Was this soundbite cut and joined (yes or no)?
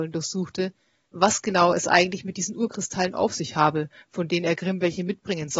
no